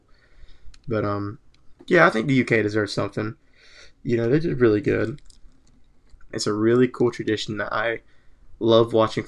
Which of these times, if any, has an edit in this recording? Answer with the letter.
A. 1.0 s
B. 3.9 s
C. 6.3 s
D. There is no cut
C